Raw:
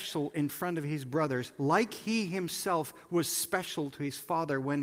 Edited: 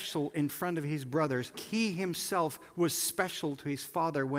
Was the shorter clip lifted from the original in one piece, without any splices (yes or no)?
no